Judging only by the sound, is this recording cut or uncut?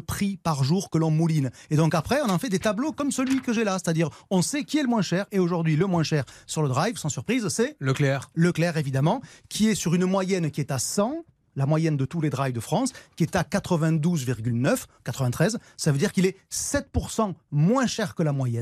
uncut